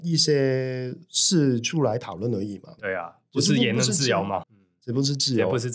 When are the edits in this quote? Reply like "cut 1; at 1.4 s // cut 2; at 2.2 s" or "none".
cut 1; at 2.8 s // cut 2; at 4.4 s